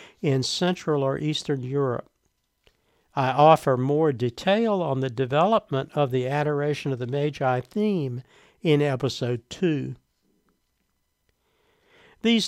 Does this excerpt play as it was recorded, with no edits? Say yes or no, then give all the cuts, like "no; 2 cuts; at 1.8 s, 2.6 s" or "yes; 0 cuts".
yes; 0 cuts